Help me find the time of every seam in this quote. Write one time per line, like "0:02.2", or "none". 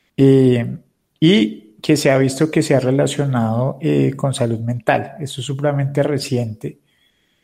none